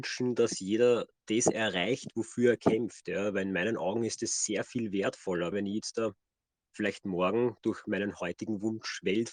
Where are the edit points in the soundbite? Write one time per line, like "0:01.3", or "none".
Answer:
0:05.5

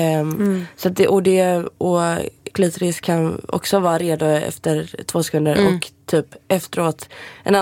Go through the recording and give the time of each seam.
none

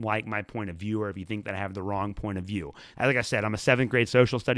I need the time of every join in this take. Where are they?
0:03.0

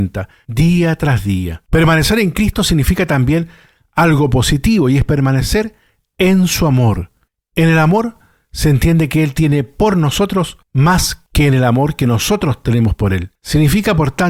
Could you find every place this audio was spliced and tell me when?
none

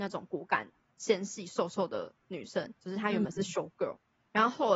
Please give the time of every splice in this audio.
0:02.8

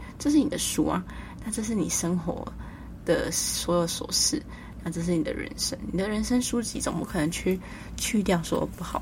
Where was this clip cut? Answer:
none

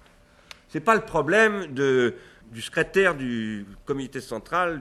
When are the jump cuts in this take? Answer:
0:02.4

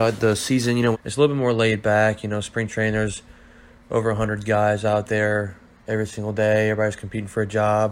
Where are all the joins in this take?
0:00.9

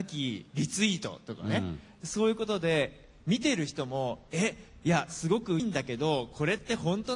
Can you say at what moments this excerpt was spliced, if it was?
0:05.6

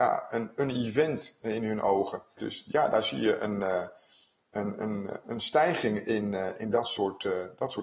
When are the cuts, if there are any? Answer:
0:02.4

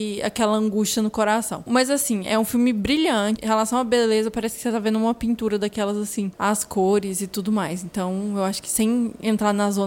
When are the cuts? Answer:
0:03.4
0:06.3

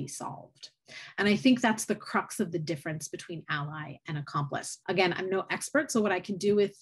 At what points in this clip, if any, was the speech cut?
0:04.8

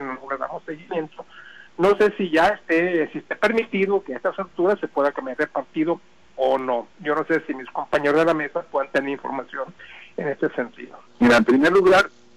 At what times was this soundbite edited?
0:11.1

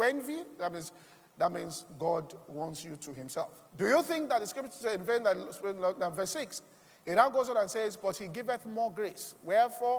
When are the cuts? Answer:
0:03.7

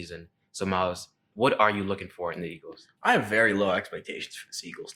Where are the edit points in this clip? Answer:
0:01.3

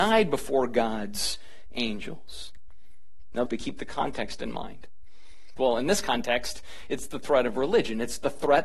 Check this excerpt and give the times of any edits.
0:03.5
0:05.6

